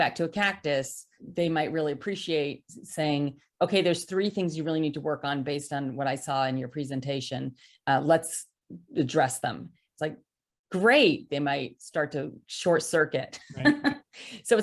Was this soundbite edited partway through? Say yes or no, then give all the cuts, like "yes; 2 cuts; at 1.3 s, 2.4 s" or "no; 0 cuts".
yes; 3 cuts; at 1.2 s, 9.9 s, 11.3 s